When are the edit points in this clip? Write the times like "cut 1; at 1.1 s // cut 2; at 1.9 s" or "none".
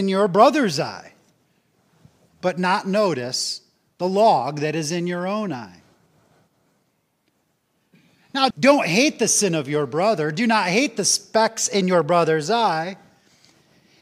cut 1; at 8.5 s